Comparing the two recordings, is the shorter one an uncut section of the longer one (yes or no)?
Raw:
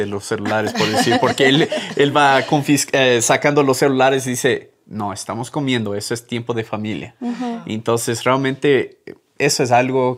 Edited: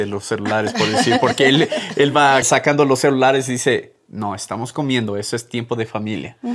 no